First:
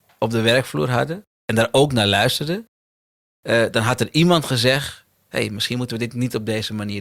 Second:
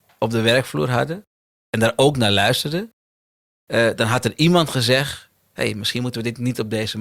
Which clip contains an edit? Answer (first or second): first